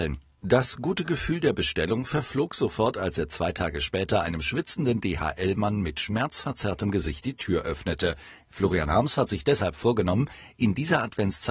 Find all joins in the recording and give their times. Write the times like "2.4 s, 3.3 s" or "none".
8.4 s